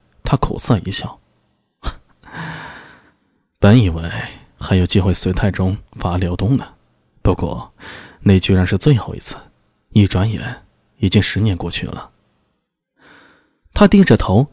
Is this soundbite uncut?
yes; 0 cuts

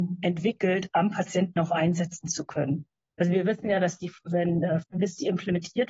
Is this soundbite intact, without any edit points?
no; 1 cut; at 4.8 s

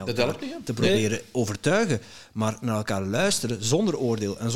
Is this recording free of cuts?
yes; 0 cuts

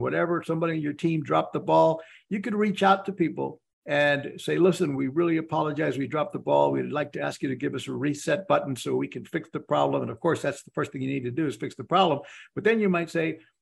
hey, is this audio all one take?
yes; 0 cuts

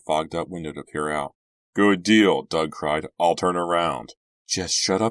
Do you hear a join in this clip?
yes; 1 cut; at 1.6 s

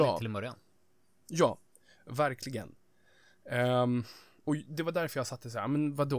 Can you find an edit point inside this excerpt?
no; 0 cuts

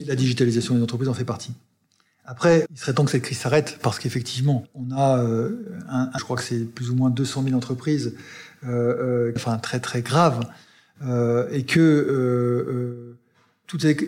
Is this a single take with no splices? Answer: no; 3 cuts; at 2.7 s, 6.2 s, 9.4 s

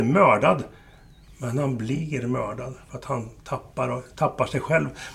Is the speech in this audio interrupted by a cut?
no; 0 cuts

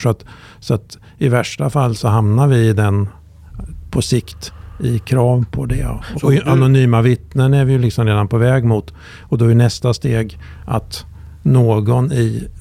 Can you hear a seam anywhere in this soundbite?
yes; 1 cut; at 6.2 s

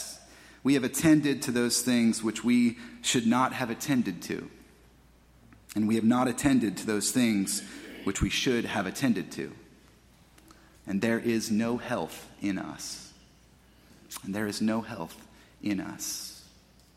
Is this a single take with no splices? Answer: yes; 0 cuts

